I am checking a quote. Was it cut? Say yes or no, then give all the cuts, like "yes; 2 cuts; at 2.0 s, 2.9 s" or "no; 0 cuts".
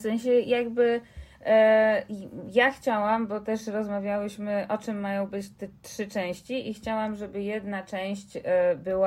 no; 0 cuts